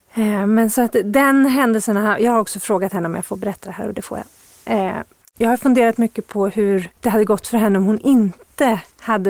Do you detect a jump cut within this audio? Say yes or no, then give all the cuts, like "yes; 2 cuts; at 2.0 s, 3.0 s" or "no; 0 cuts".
yes; 2 cuts; at 5.2 s, 7.0 s